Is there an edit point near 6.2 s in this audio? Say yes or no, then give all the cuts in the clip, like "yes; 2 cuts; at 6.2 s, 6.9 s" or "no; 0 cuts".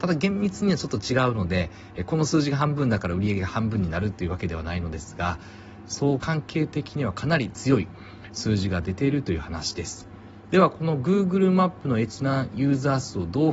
yes; 1 cut; at 6.2 s